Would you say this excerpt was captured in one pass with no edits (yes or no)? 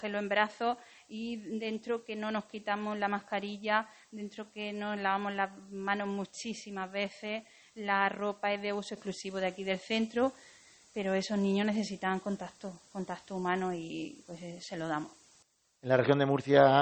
yes